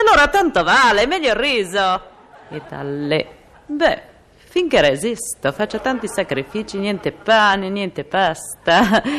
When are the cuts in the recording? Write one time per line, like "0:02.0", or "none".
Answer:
0:03.5

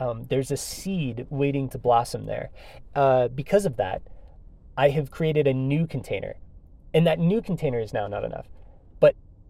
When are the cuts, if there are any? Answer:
none

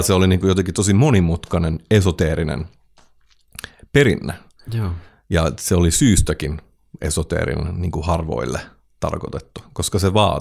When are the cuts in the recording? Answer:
none

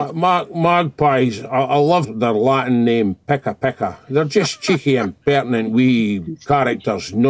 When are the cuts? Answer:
0:02.0

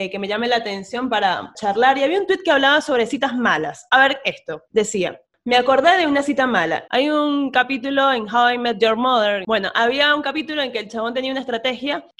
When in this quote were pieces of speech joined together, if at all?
0:06.9

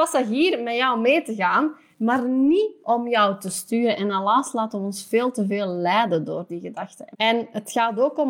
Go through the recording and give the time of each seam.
0:07.1

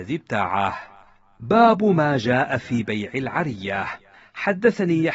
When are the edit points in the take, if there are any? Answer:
none

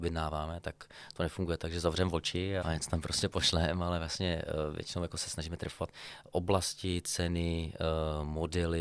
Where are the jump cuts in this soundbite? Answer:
0:02.6

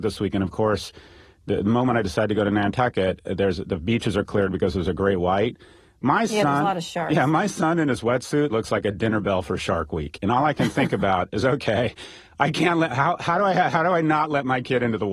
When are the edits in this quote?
0:08.5

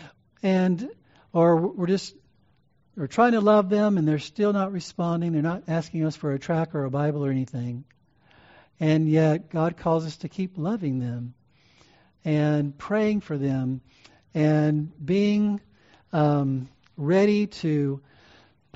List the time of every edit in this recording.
none

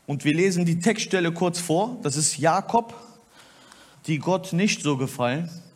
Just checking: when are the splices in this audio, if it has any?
0:03.9

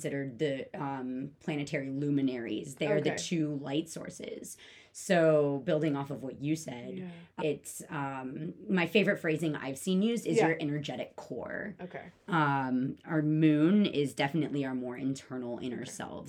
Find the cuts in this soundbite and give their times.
0:07.4
0:11.8

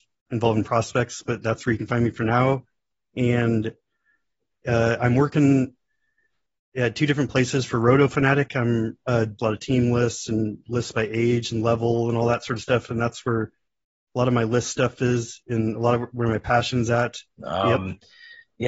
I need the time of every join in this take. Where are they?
0:09.4
0:17.3

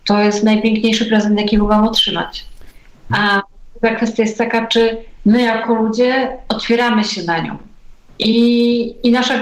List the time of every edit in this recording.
0:03.1

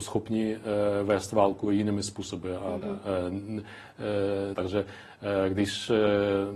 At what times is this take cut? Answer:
0:02.8
0:04.5

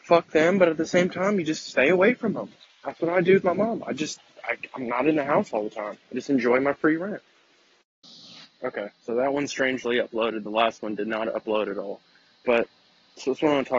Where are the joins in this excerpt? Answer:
none

